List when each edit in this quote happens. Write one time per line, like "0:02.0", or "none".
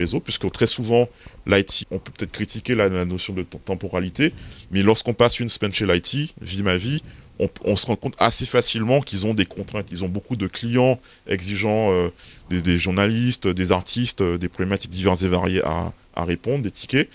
0:01.8

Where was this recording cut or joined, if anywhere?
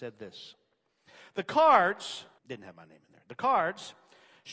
0:02.4

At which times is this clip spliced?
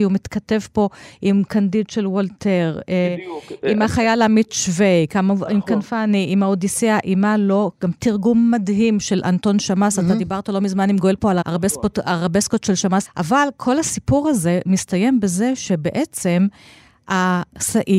0:11.4
0:13.0

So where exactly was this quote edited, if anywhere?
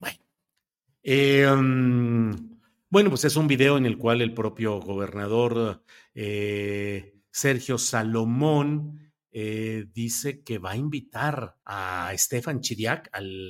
0:11.6

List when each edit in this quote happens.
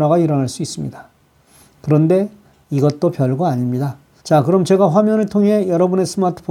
0:04.2

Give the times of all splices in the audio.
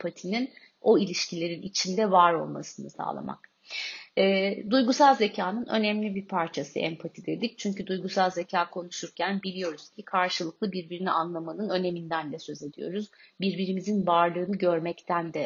none

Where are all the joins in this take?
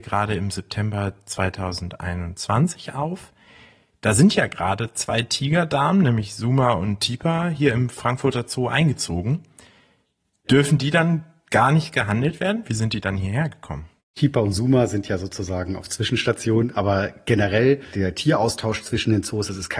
none

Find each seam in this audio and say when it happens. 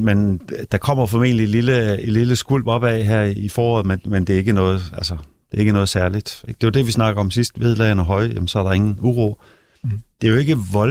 0:06.5

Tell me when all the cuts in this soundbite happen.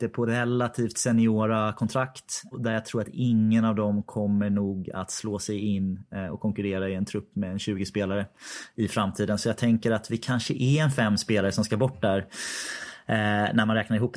0:02.5

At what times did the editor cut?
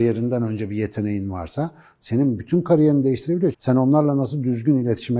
0:03.5

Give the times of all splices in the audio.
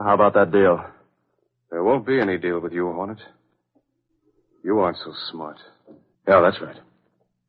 0:06.1

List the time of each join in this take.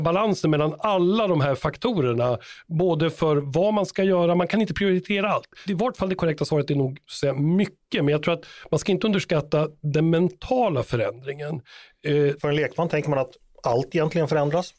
0:05.7
0:12.4

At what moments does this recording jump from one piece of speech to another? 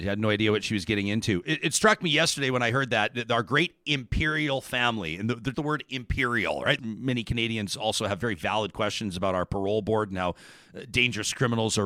0:05.5
0:06.8

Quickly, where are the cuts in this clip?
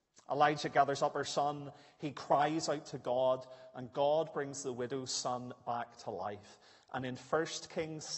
none

